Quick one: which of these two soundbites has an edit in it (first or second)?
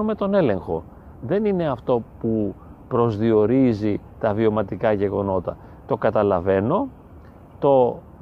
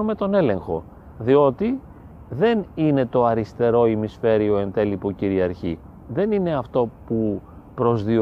first